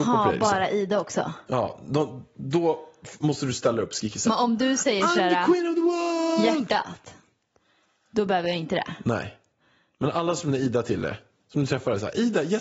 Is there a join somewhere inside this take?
no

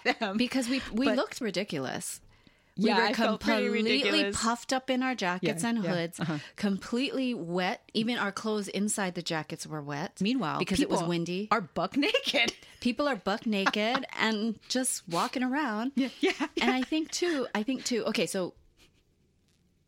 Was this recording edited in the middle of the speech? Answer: yes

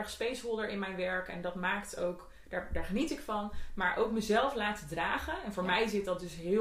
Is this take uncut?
yes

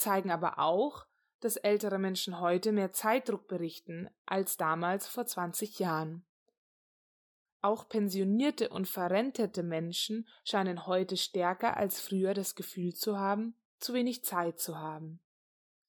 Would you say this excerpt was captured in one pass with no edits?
no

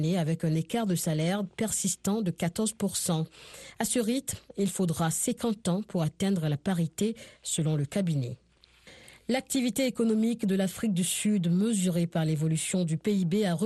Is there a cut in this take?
no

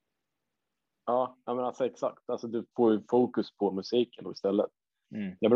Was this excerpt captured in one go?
no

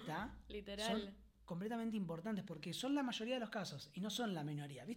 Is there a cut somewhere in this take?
no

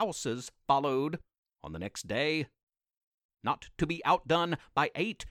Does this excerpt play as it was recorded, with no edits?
yes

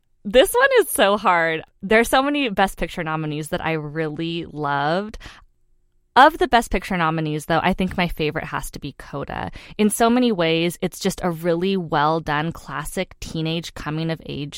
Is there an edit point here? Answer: no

